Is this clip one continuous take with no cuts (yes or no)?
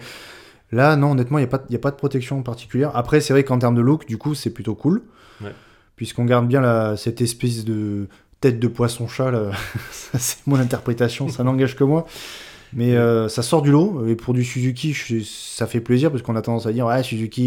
yes